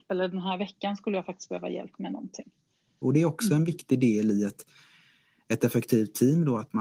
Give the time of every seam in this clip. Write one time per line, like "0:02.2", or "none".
0:03.0